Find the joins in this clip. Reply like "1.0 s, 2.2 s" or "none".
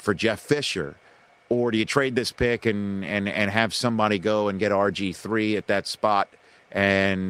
none